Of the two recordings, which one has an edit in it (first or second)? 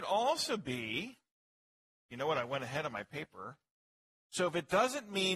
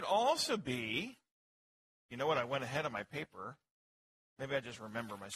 first